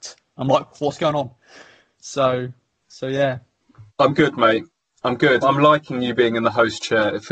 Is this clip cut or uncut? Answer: cut